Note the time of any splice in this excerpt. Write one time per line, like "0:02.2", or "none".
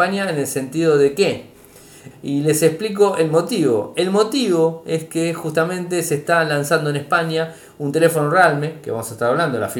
0:02.1